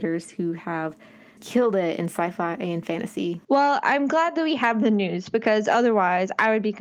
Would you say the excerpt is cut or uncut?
cut